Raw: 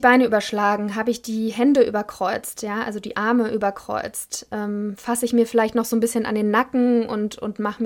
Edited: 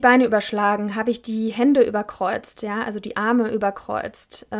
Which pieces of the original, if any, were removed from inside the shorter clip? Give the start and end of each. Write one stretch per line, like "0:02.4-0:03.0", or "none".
none